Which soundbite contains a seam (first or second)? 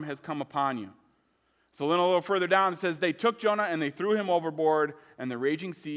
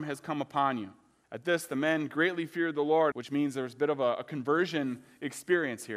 second